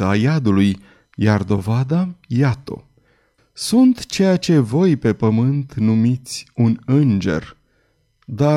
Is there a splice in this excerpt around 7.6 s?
no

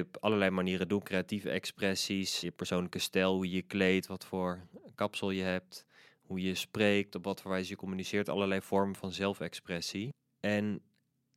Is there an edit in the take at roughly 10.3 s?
no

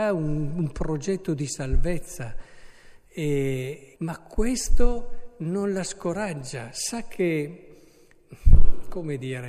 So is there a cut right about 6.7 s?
no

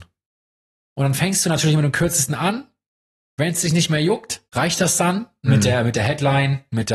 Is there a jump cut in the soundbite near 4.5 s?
yes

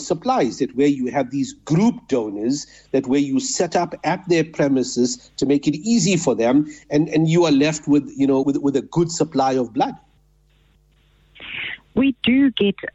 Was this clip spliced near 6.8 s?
no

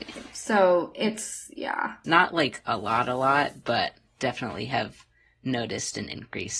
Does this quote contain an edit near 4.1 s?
no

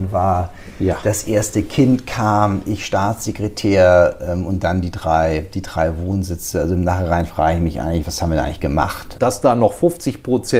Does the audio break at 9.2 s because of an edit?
yes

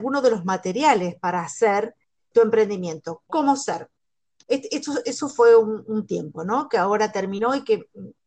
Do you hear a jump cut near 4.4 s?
no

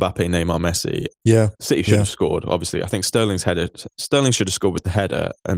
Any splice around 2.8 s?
no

